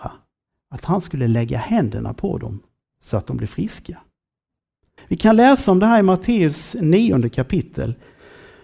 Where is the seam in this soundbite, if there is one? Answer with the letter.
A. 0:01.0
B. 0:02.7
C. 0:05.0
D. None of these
C